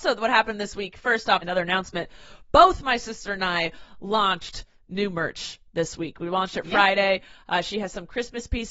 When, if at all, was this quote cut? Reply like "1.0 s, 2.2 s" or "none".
1.4 s